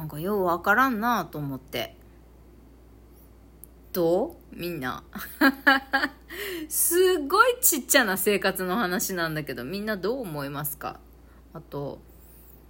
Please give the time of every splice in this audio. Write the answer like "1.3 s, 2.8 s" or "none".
none